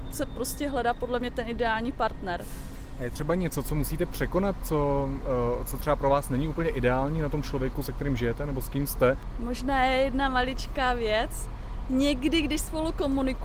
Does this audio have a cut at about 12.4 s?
no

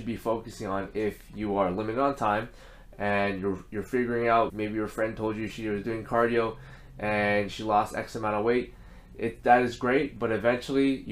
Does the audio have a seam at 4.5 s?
yes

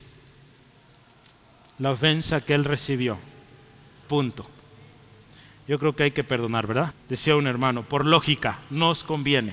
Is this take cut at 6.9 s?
yes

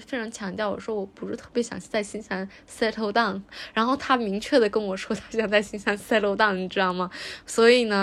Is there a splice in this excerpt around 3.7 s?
no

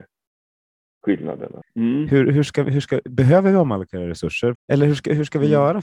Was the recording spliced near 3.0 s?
no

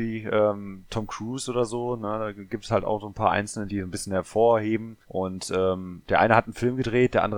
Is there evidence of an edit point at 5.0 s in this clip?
yes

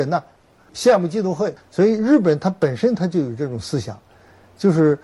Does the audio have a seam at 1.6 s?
yes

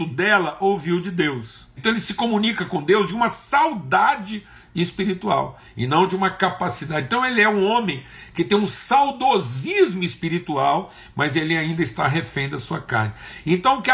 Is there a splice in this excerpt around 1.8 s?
yes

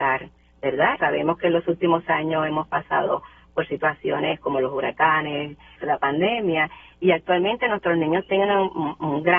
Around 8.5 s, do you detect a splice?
no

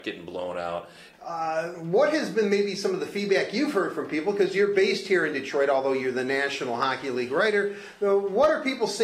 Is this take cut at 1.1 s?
yes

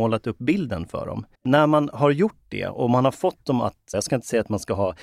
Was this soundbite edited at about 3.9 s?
yes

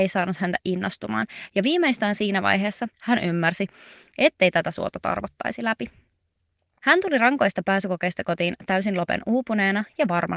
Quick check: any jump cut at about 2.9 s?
yes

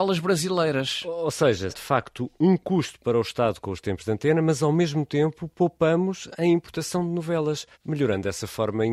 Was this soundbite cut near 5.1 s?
no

